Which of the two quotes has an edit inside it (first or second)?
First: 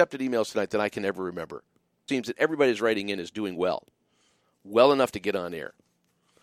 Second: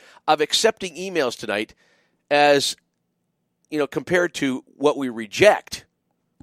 first